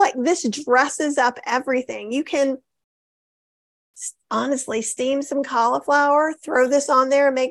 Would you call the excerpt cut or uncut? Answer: uncut